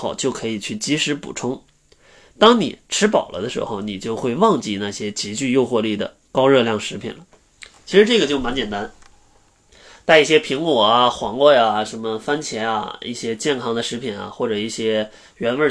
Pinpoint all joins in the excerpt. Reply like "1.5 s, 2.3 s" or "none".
none